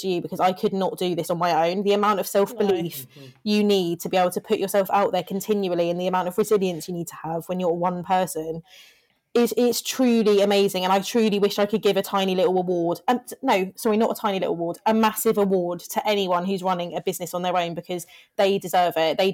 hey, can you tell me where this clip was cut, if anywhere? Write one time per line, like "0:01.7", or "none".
none